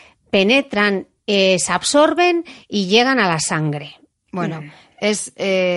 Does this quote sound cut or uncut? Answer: uncut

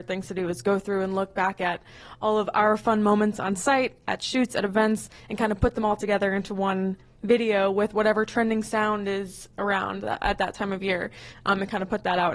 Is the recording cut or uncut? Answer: uncut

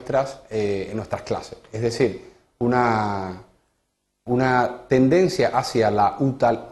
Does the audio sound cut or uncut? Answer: uncut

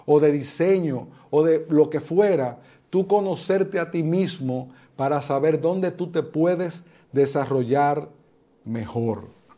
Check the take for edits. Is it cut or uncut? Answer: uncut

